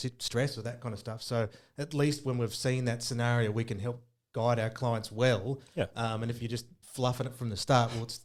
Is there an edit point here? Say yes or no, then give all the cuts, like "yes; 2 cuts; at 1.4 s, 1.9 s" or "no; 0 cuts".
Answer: yes; 1 cut; at 6.8 s